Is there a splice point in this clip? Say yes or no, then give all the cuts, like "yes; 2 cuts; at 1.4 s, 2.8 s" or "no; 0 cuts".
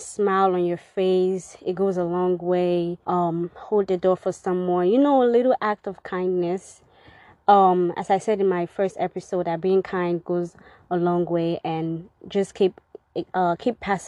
yes; 1 cut; at 3.0 s